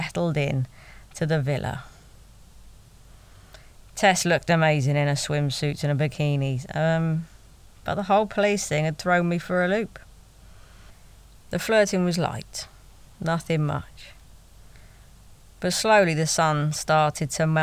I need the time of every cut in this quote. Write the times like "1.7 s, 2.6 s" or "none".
none